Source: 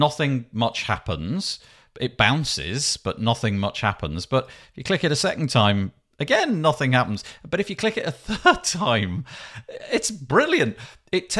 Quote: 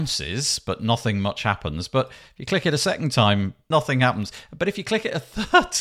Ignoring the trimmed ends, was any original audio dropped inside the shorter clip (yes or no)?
yes